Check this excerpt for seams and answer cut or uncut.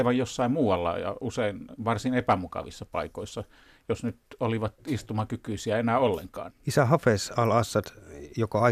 cut